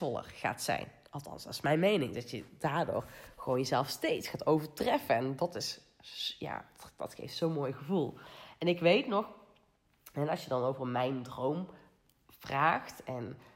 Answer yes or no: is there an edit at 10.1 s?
no